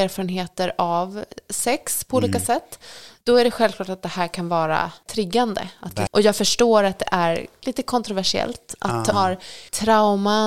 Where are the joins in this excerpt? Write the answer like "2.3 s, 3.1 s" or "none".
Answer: 6.1 s, 9.1 s